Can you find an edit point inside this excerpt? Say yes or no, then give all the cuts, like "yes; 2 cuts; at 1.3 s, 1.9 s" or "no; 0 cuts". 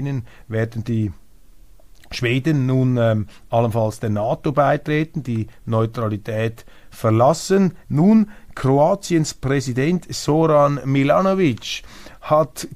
yes; 1 cut; at 7.8 s